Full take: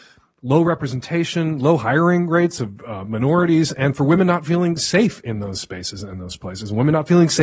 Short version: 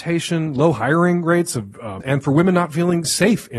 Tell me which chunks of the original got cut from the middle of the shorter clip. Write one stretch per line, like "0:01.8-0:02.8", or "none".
0:03.1-0:03.7